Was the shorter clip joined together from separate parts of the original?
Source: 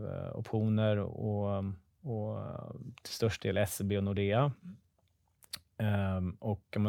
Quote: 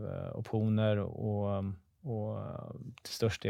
no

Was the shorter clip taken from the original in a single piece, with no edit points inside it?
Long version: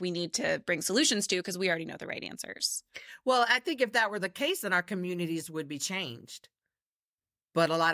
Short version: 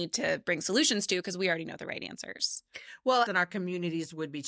no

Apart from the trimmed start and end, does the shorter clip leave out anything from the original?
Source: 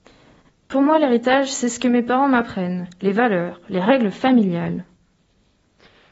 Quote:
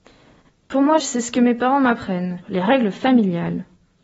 yes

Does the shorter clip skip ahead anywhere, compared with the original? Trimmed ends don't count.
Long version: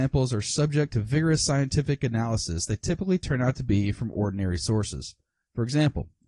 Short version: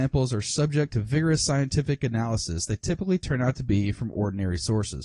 no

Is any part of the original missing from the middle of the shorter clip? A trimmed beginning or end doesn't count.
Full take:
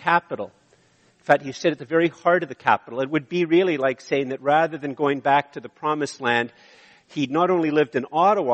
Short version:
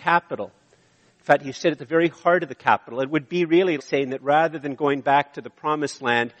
yes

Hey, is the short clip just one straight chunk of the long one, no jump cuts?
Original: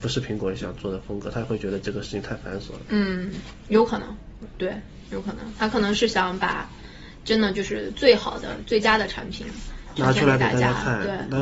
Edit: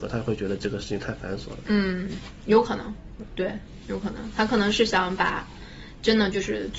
yes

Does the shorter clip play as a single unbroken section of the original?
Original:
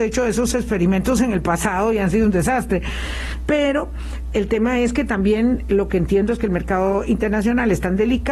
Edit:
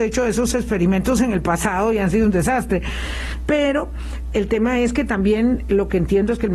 yes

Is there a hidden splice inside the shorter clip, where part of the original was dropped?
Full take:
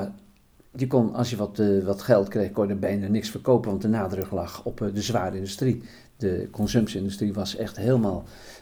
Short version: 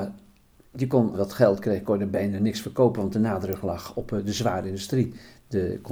yes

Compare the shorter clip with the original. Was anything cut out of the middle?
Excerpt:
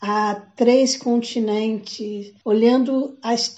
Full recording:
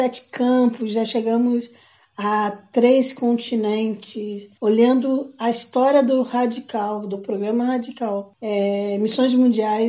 no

